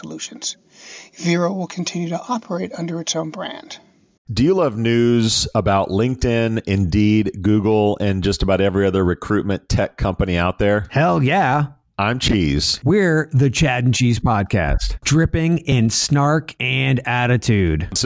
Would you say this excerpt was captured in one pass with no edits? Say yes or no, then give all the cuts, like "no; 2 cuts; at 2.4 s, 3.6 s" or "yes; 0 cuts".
no; 2 cuts; at 11.9 s, 15.0 s